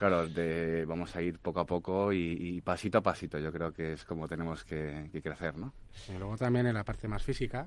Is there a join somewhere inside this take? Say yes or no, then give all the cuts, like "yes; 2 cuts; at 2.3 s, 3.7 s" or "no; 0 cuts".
no; 0 cuts